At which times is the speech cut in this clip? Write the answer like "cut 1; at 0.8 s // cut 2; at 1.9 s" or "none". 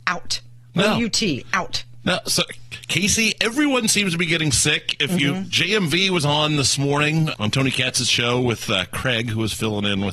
cut 1; at 7.3 s

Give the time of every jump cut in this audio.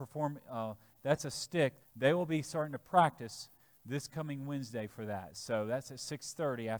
cut 1; at 1.8 s

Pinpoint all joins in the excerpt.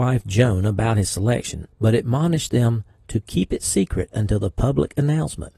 cut 1; at 1.7 s

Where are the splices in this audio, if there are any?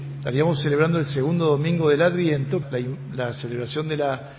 cut 1; at 2.6 s

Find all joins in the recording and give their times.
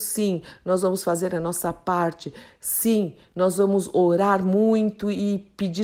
none

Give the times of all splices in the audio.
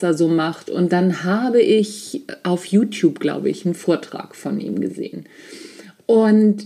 none

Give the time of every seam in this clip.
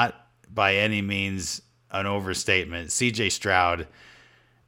none

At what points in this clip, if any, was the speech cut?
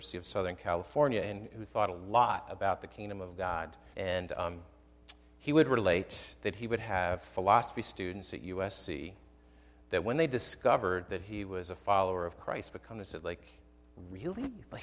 cut 1; at 3.9 s

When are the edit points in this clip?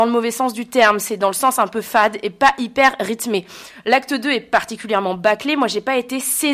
none

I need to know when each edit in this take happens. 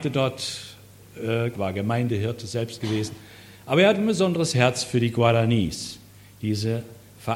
cut 1; at 1.5 s

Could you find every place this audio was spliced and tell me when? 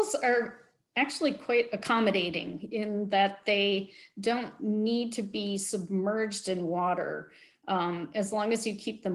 none

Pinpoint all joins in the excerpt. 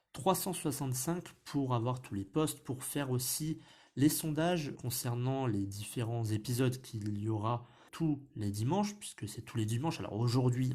cut 1; at 4.7 s // cut 2; at 7.9 s

